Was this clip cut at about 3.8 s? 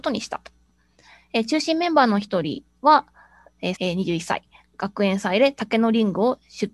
yes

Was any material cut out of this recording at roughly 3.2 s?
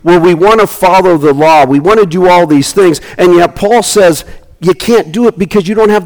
no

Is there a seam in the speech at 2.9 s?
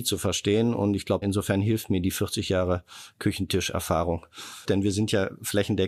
no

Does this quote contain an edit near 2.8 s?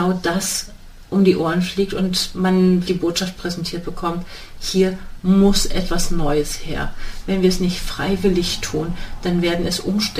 yes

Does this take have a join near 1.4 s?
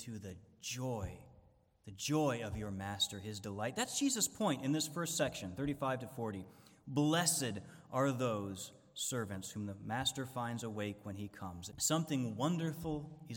no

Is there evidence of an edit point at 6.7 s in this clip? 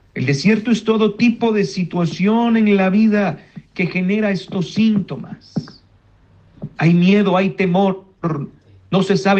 yes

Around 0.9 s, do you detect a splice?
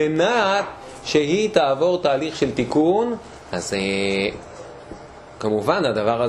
no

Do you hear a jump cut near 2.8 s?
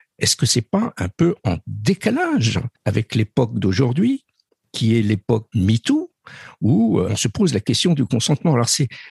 yes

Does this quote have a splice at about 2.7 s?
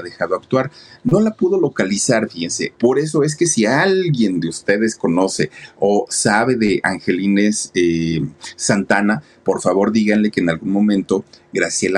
yes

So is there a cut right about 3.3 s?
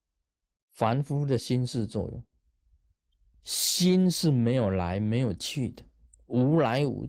yes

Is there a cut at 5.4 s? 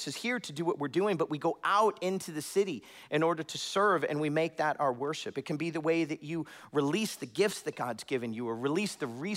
no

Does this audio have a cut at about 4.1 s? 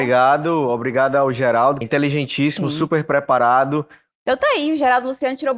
yes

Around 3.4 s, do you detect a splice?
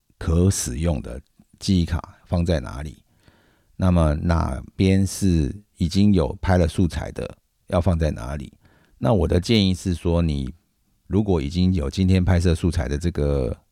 no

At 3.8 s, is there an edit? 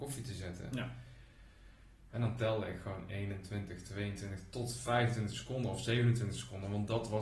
no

